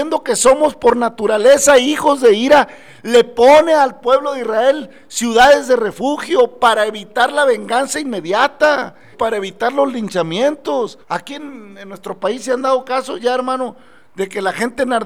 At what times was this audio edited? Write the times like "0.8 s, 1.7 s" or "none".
9.1 s, 11.0 s